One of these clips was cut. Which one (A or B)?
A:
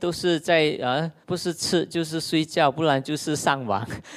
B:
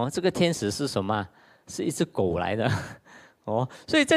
A